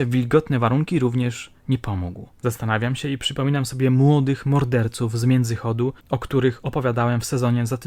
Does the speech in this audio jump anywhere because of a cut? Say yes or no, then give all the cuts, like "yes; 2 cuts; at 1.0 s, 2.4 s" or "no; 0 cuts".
yes; 2 cuts; at 2.3 s, 6.0 s